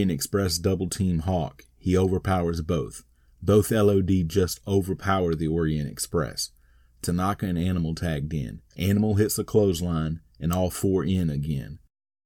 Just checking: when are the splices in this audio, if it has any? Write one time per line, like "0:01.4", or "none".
0:08.7